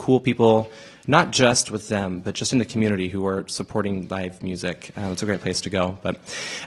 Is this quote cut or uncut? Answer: uncut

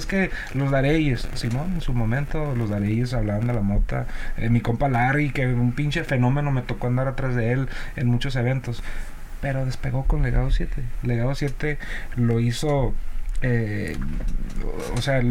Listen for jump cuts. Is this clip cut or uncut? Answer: uncut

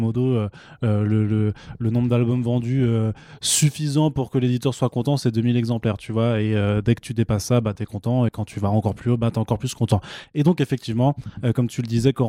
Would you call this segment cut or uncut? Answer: uncut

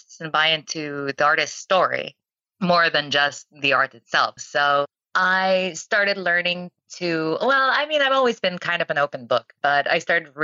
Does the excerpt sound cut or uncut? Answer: cut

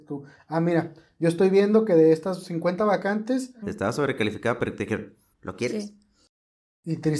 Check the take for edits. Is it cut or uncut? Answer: cut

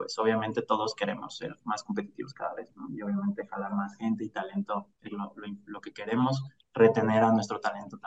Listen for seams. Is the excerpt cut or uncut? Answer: uncut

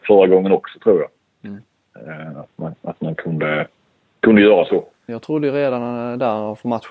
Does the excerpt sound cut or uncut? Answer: cut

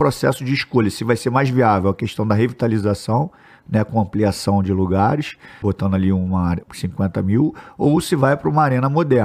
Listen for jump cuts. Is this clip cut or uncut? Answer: cut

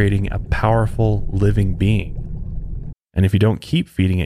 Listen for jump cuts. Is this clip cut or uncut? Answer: cut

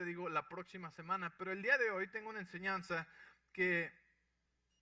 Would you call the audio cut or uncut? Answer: uncut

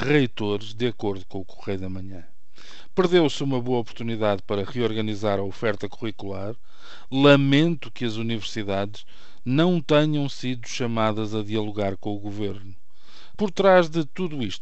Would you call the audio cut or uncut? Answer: cut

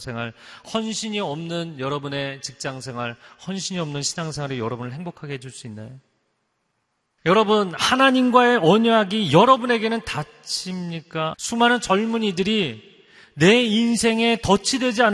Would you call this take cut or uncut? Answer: cut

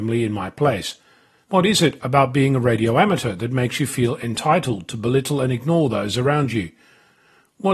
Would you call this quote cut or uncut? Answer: cut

